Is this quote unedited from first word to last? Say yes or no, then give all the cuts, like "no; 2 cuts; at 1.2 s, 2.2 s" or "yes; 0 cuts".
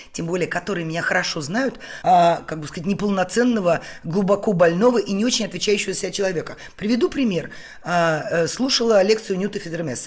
no; 1 cut; at 2.0 s